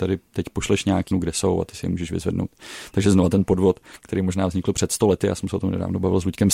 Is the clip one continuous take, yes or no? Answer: no